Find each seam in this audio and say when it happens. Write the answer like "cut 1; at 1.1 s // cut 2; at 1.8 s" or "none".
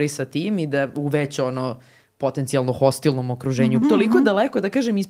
cut 1; at 3.8 s